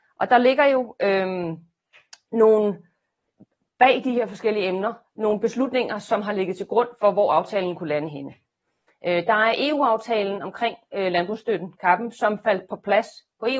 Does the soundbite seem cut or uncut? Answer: uncut